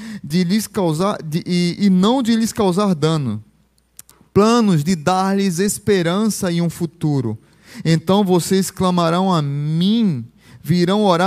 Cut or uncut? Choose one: uncut